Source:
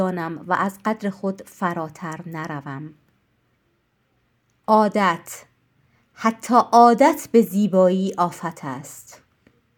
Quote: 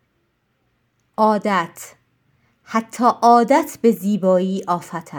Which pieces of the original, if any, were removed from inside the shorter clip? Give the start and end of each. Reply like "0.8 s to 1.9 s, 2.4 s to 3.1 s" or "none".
none